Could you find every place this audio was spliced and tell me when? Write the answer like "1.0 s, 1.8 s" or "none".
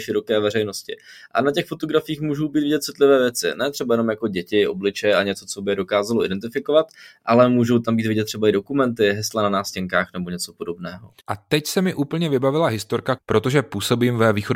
11.2 s, 13.2 s